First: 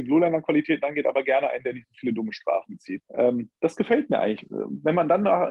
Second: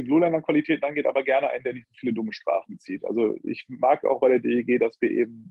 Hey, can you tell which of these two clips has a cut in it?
first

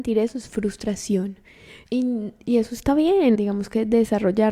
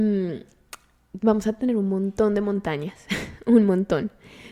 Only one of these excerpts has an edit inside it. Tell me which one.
first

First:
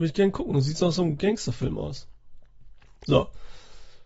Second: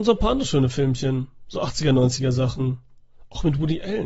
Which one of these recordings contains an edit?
first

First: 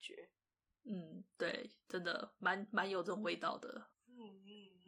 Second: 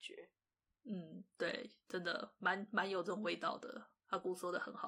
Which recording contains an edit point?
first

